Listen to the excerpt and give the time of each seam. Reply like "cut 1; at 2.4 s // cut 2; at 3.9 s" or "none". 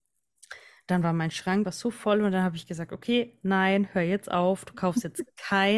cut 1; at 1.6 s